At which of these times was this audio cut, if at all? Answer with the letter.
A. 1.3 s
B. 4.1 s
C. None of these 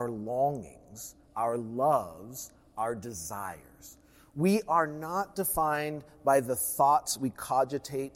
C